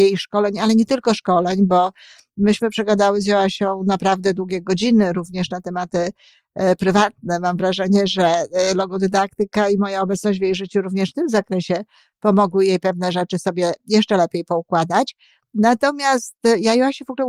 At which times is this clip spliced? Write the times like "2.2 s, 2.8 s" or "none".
none